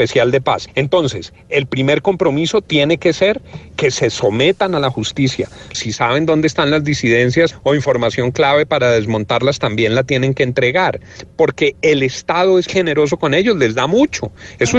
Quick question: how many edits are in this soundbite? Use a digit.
2